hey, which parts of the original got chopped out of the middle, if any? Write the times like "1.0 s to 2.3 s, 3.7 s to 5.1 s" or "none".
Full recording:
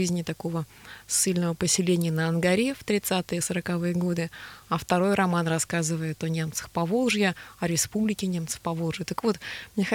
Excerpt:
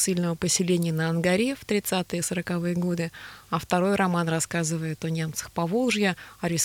none